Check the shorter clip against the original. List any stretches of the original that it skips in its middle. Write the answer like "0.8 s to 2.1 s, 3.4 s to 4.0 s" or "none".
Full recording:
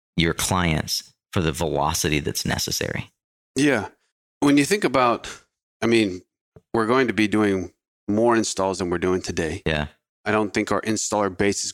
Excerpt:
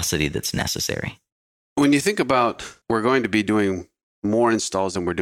3.4 s to 4.2 s, 5.5 s to 6.7 s